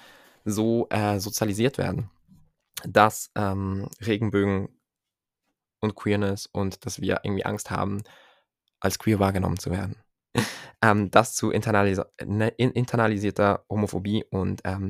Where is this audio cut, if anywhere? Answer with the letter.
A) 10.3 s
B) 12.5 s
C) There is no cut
A